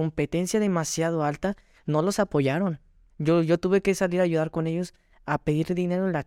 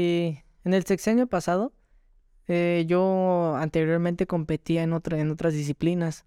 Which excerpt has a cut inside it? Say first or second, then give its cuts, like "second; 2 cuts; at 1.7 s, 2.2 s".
first; 1 cut; at 3.1 s